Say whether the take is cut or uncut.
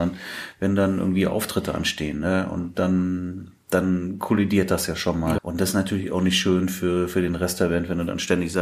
cut